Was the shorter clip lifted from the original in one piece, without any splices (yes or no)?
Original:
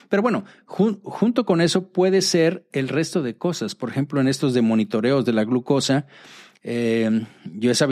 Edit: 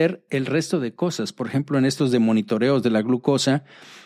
yes